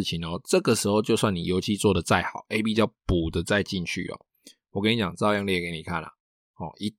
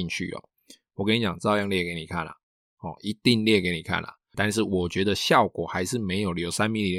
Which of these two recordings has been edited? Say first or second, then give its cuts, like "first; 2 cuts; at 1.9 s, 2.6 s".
second; 1 cut; at 4.3 s